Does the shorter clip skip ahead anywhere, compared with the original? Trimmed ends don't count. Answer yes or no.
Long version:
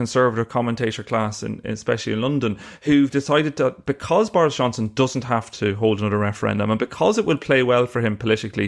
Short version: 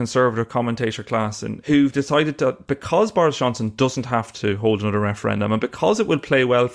yes